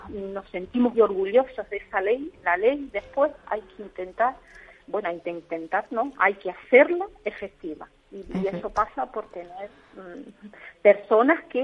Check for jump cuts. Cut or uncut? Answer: cut